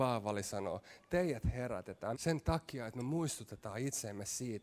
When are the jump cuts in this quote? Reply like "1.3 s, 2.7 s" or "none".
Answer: 2.1 s